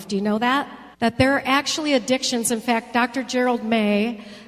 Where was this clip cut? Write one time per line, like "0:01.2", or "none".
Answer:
0:00.9